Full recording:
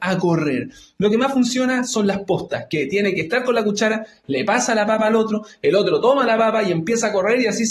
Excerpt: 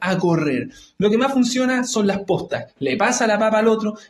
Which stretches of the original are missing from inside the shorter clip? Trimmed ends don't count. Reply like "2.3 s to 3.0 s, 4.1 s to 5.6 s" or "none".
2.7 s to 4.1 s